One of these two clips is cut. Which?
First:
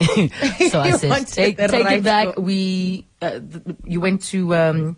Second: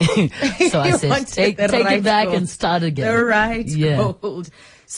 first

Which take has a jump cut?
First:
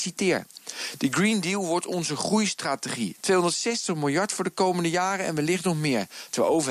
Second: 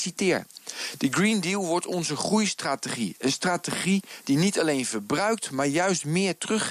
first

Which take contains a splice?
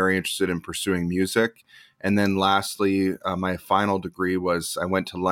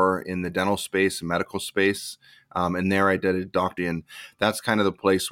second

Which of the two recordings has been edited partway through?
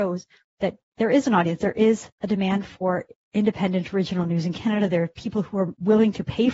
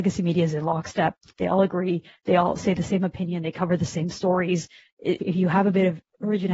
second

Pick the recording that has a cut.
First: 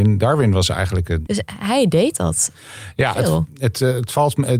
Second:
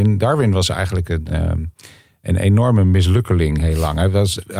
first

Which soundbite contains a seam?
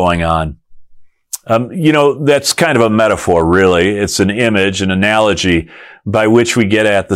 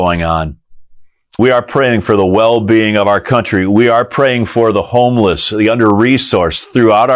second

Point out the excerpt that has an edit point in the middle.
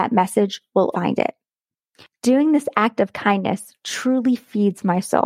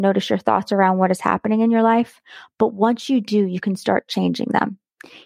first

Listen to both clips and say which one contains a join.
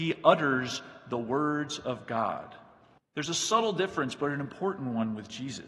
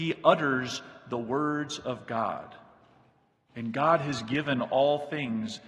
first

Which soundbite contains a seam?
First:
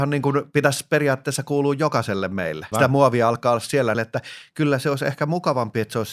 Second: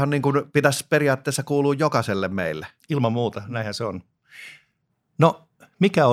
first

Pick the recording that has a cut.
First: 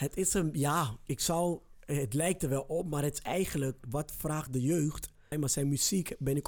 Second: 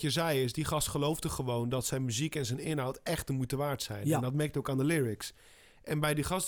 first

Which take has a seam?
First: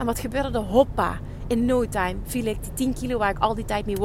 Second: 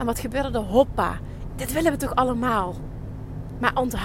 second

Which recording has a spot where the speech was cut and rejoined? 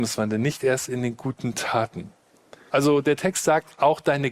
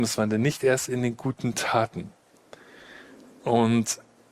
first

